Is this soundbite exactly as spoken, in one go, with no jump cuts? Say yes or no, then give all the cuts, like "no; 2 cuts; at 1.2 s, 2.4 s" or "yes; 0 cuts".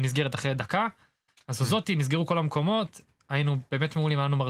yes; 0 cuts